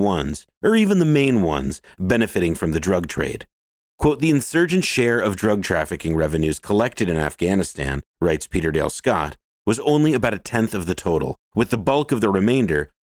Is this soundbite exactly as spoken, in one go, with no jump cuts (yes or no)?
yes